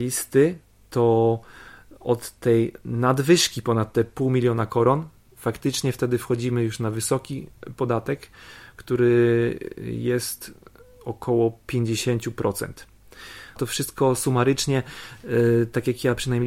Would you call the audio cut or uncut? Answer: cut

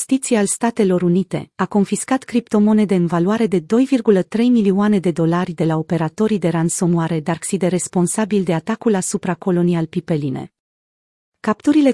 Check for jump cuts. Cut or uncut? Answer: cut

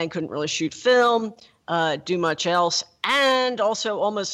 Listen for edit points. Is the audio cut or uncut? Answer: uncut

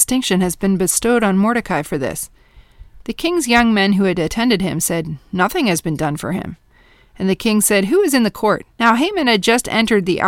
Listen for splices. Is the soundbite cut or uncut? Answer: uncut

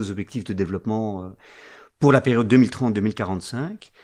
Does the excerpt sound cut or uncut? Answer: uncut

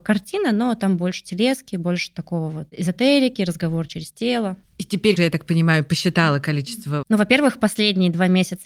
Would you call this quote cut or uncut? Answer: cut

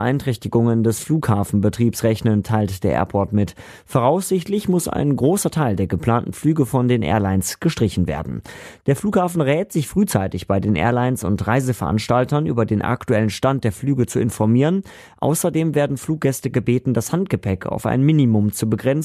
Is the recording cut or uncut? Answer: uncut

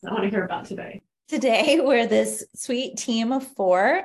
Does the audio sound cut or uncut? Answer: uncut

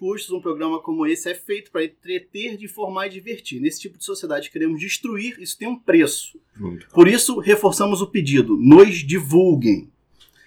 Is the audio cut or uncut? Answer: cut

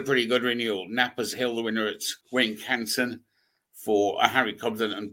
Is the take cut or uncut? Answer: cut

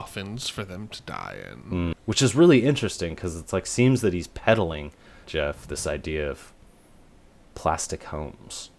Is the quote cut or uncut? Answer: cut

